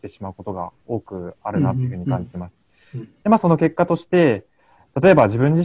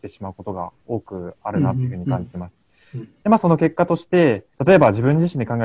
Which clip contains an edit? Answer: second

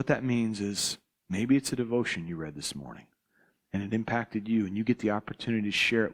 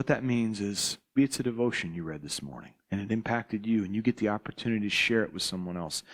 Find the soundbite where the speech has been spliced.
second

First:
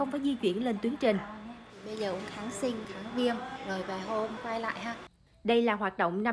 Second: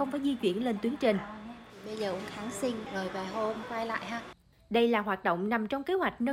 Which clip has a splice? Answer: second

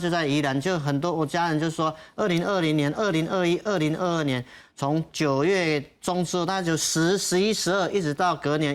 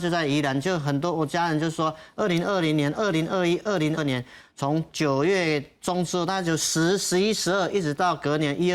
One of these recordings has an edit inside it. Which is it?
second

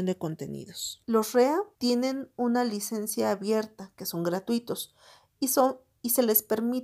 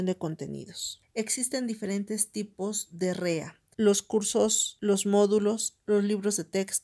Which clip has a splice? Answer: second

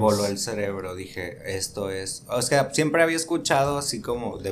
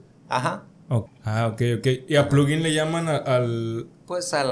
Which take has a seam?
second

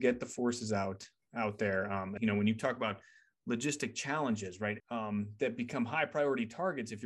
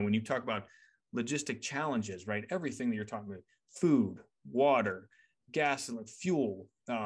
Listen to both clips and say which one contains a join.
first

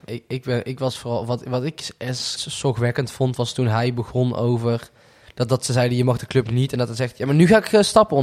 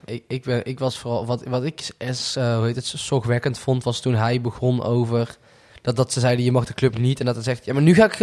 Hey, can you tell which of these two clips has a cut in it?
first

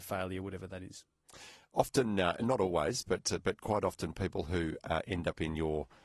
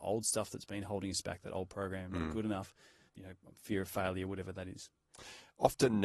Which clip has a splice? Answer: second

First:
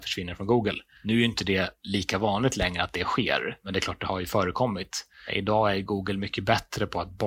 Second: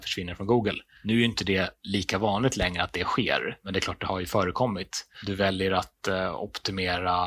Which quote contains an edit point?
second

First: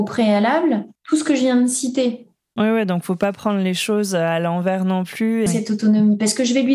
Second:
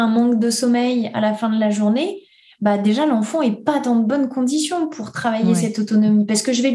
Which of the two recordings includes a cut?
first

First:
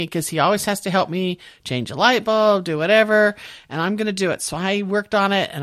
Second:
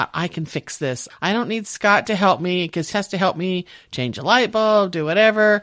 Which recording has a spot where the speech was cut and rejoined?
second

